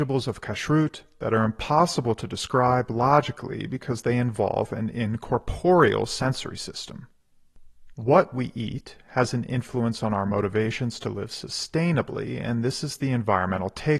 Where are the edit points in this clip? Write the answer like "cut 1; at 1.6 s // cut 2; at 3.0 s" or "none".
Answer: cut 1; at 7.9 s